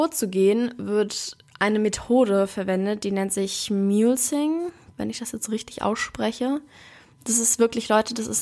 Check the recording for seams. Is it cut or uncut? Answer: uncut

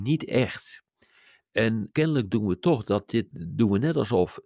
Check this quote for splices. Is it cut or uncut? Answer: cut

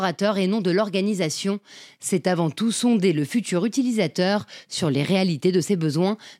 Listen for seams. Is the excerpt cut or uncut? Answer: uncut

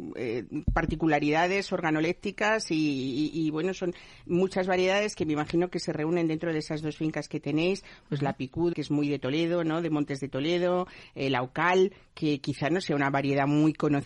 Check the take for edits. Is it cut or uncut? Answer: cut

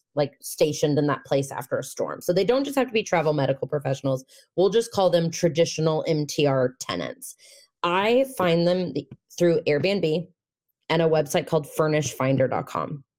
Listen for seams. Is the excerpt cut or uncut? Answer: uncut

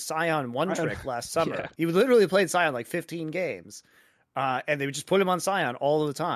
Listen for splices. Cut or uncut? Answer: uncut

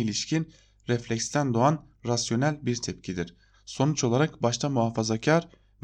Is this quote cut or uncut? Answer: cut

